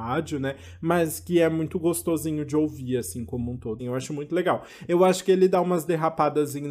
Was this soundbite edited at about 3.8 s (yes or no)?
yes